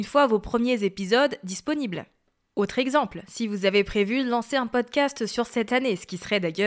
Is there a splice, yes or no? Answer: yes